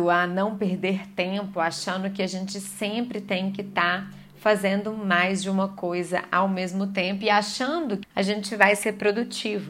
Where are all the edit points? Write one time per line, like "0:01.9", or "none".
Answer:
0:08.0

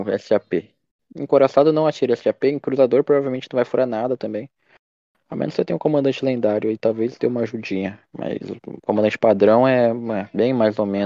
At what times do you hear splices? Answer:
none

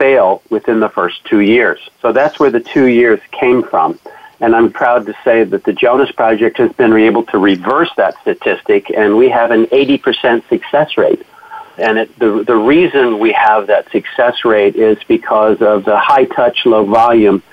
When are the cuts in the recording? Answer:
0:01.9
0:04.7
0:11.8

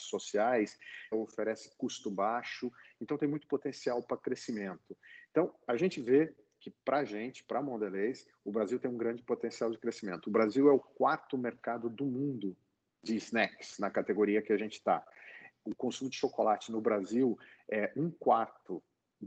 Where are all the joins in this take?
0:01.1
0:15.5

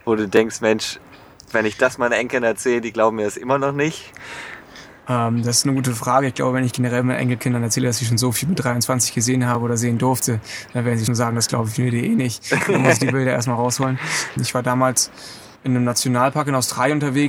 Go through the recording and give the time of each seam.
0:11.1
0:14.4
0:15.6

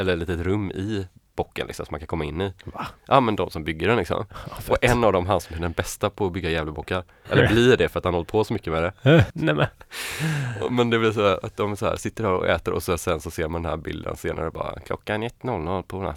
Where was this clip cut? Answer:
0:07.2
0:09.3

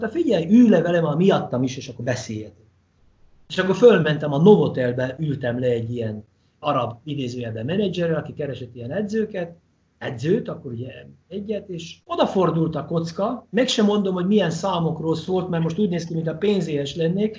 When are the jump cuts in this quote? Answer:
0:06.6
0:12.0

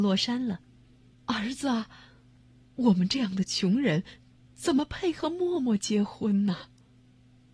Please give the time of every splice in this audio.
0:01.1

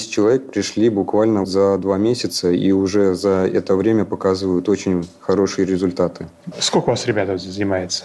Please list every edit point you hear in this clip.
0:01.4
0:06.5

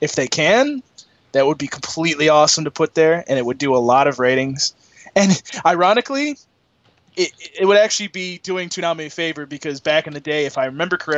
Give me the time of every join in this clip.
none

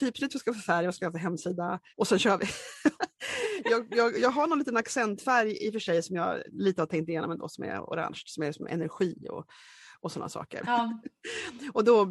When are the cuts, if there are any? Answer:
0:01.9
0:03.0
0:10.6

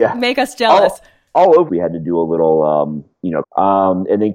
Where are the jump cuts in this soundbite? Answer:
0:01.7
0:03.4

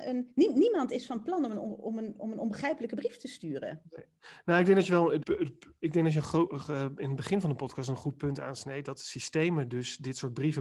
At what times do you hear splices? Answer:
0:05.2

